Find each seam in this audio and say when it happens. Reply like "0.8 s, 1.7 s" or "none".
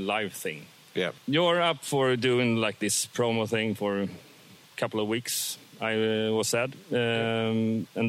1.2 s